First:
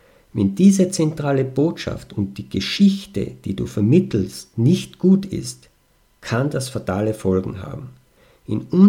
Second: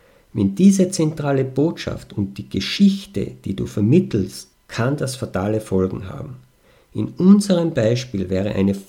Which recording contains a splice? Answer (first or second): second